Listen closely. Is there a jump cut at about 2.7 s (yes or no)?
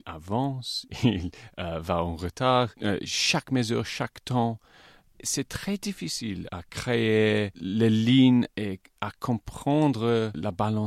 no